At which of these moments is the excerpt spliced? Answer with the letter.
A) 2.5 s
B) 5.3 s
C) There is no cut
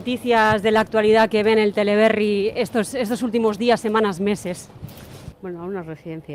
B